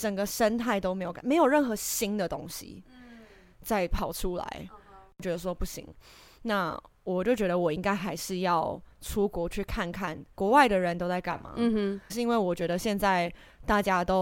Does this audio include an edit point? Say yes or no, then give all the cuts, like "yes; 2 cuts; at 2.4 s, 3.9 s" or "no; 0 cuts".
yes; 2 cuts; at 10.3 s, 12.1 s